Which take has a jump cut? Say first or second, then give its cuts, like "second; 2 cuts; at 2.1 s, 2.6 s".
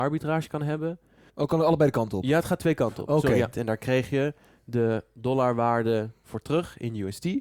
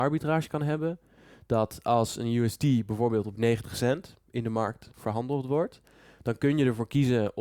first; 2 cuts; at 1.3 s, 3.5 s